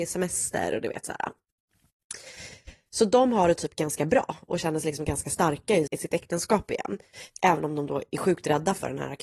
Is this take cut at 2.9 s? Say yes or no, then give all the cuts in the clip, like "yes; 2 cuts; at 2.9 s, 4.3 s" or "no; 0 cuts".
no; 1 cut; at 5.9 s